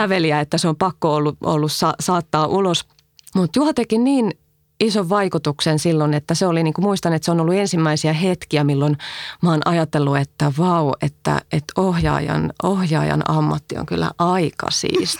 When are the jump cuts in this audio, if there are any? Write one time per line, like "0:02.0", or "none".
0:03.3